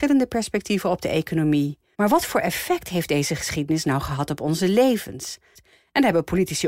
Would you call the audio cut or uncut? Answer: cut